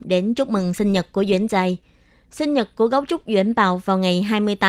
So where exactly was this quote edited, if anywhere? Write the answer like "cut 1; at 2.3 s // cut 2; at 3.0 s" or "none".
none